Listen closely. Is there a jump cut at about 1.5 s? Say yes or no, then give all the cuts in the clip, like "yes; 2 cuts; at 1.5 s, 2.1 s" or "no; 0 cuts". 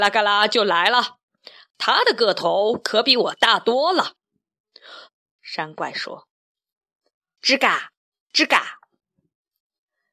no; 2 cuts; at 5.1 s, 7.3 s